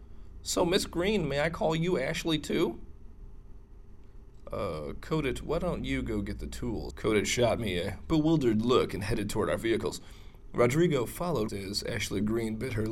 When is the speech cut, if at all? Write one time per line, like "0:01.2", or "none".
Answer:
0:06.9
0:11.5

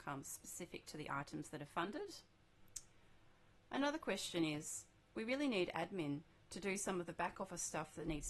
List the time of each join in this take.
none

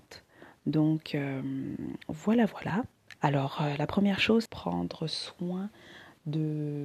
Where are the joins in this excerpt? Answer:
0:03.2
0:04.5

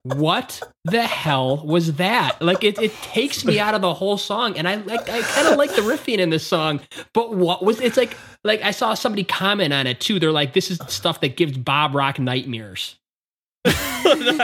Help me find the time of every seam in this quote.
none

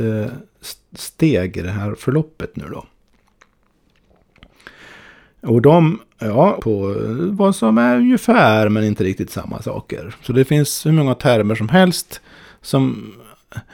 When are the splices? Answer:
0:06.6

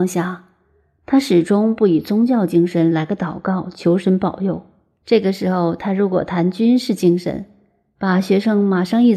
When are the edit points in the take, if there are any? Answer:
0:05.0

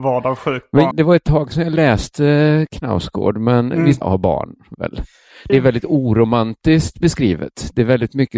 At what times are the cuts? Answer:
0:00.9
0:04.0
0:05.5

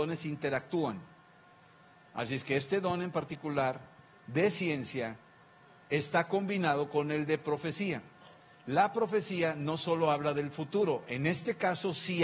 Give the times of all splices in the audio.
none

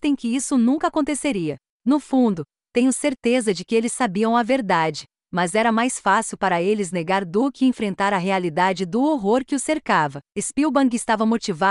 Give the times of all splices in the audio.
0:10.3

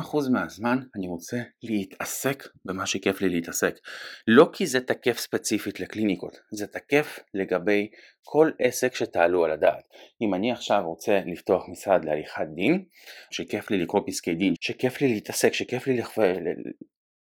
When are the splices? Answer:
0:13.3
0:14.6

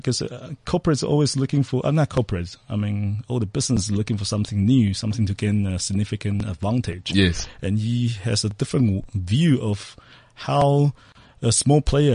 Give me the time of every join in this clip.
none

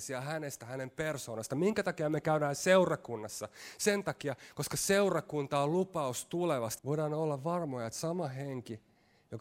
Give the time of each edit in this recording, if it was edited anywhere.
0:06.8

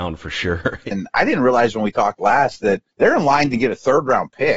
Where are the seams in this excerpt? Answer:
0:00.9
0:02.9

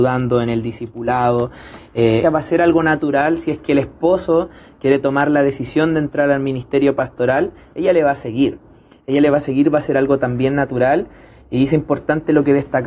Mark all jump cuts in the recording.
0:02.2

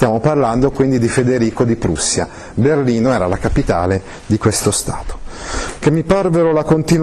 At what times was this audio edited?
none

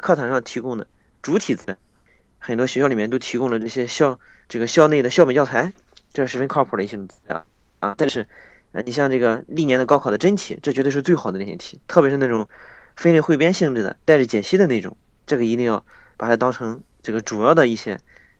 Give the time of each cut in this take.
none

